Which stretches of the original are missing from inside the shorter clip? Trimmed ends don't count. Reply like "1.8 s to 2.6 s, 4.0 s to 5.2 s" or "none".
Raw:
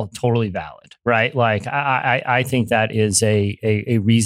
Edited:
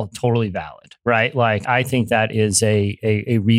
1.6 s to 2.2 s

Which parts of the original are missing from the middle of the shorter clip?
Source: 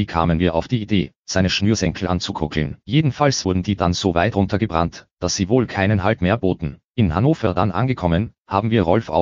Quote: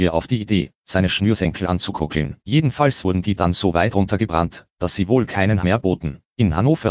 6.0 s to 6.2 s

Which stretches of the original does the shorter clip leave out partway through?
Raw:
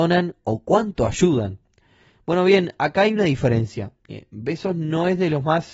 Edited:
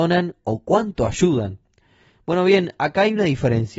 none

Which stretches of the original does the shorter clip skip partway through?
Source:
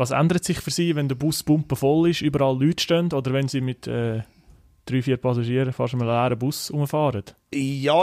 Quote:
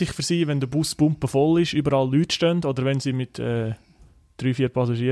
none

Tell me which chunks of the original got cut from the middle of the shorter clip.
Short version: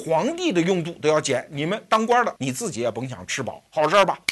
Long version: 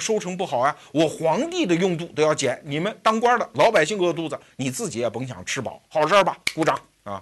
3.5 s to 4.5 s

